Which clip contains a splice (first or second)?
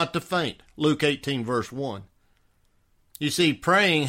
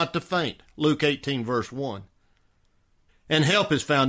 second